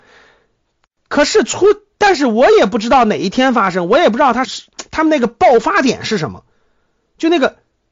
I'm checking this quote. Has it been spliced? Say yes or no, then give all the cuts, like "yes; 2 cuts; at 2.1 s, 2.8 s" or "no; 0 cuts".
yes; 1 cut; at 4.4 s